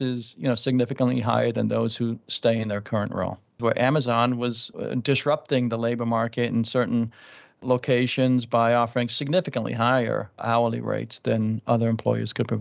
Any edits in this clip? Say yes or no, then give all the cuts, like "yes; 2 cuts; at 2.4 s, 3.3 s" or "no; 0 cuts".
yes; 2 cuts; at 3.6 s, 4.7 s